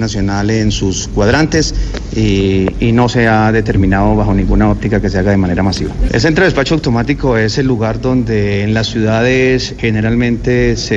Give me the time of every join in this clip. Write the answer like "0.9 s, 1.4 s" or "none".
6.1 s, 9.8 s